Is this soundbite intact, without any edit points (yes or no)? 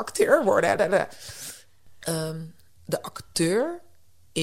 no